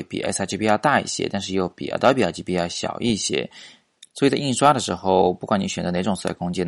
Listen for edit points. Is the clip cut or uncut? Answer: uncut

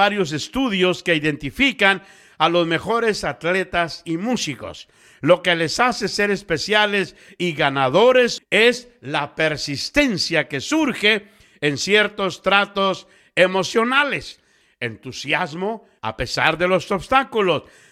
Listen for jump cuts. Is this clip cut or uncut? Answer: cut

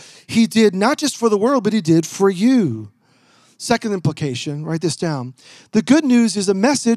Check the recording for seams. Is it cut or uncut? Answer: uncut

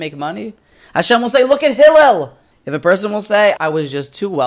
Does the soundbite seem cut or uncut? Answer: cut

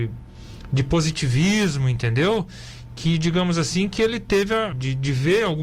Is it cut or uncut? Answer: cut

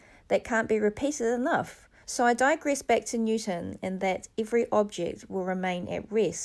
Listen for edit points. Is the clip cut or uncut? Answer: cut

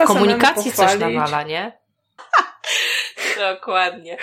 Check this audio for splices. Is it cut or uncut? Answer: cut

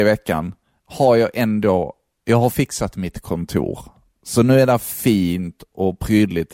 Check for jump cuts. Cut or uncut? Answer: uncut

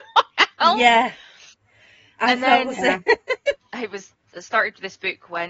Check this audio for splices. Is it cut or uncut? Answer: cut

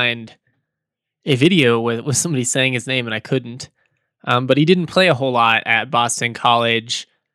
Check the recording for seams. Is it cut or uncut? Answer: uncut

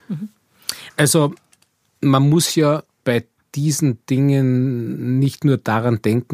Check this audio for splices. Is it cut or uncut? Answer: cut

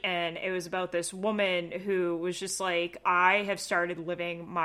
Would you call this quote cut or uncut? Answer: cut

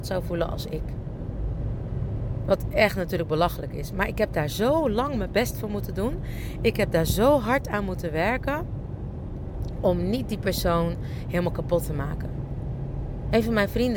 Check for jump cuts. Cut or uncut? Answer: uncut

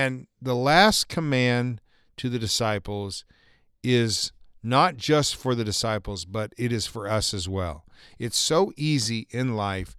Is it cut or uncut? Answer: uncut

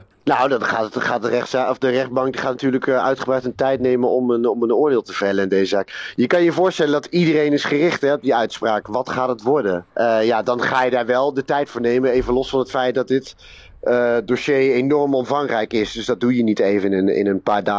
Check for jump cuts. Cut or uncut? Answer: uncut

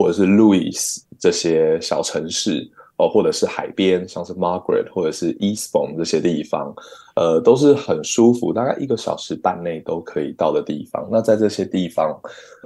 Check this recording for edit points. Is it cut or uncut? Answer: uncut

